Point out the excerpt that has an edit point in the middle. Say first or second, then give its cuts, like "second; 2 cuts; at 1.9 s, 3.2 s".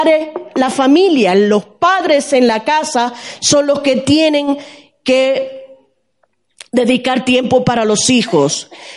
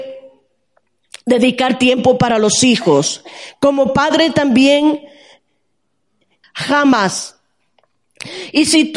second; 1 cut; at 6.4 s